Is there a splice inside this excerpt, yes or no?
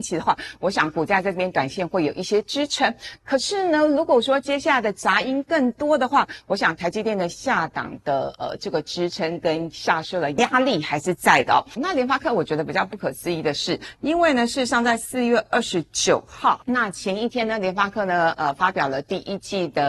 yes